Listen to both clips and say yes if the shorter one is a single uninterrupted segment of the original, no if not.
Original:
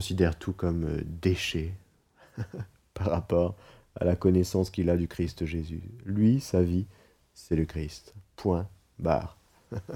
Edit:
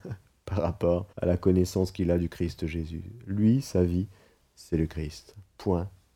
no